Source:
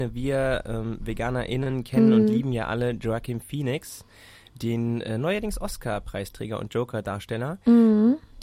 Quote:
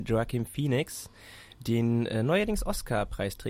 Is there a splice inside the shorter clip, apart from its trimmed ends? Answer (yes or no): no